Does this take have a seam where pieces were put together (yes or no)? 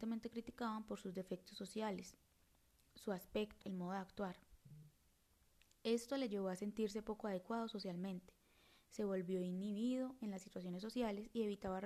yes